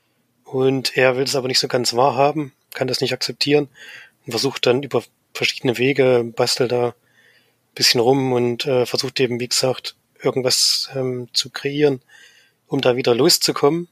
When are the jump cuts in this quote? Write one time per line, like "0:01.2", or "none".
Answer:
0:02.7